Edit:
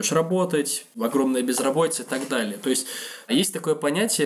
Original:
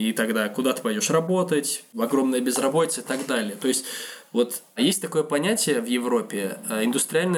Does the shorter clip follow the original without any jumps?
no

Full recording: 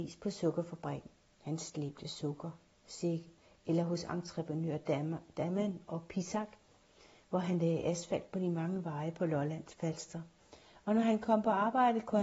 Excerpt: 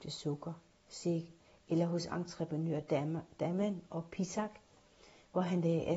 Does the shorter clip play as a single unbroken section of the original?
yes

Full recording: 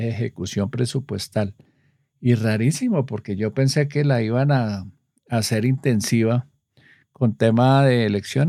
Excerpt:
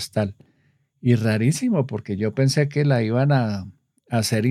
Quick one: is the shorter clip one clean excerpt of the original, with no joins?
yes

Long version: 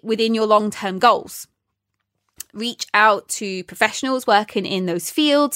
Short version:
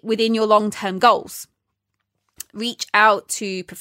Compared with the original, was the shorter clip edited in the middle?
no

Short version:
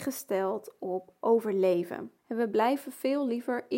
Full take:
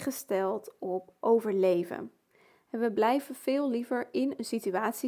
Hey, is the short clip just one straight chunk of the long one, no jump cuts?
no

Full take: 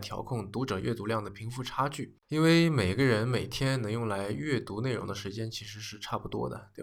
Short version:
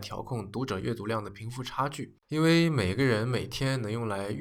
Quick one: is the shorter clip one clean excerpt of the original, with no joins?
yes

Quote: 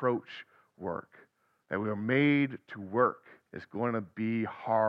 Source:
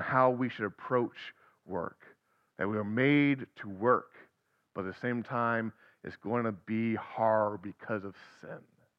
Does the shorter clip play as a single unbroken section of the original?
no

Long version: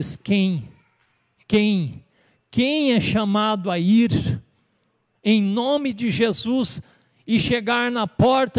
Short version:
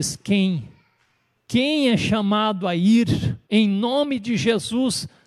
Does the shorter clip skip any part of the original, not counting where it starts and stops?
yes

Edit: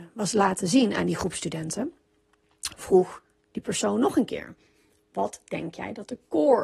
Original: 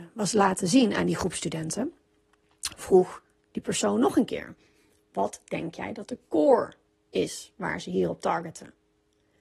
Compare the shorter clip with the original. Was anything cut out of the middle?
no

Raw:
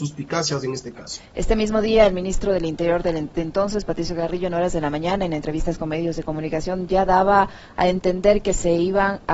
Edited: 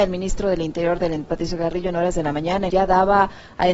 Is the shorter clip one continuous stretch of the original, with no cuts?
no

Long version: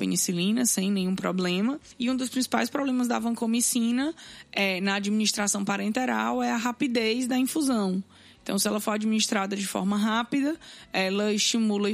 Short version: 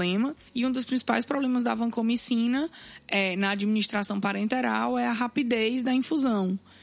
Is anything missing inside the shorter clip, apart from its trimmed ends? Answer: no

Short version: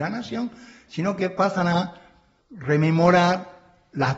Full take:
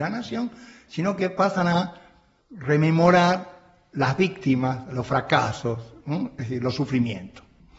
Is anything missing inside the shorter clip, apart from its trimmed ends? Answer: no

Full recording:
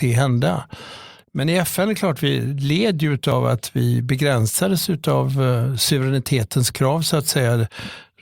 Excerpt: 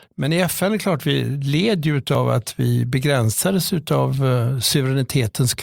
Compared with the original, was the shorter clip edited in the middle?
no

